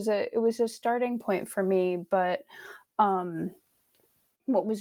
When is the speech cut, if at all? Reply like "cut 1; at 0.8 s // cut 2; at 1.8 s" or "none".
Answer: none